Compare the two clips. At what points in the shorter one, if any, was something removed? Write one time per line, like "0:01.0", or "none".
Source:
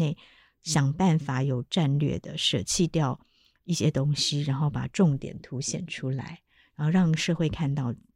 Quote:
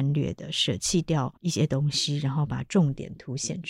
0:01.4